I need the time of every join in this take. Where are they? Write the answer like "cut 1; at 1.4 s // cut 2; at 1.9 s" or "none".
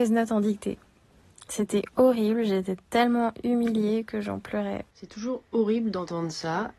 cut 1; at 4.9 s

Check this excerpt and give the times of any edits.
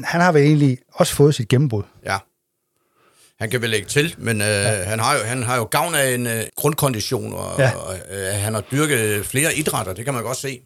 cut 1; at 6.5 s

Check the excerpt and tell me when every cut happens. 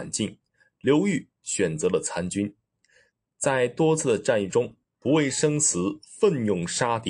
cut 1; at 4.9 s

